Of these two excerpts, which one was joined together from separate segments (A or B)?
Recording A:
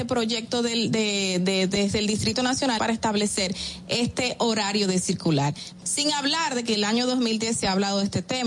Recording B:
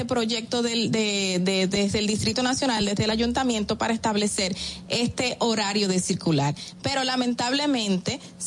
A